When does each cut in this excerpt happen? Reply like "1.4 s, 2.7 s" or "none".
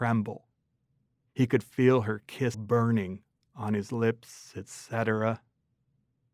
2.5 s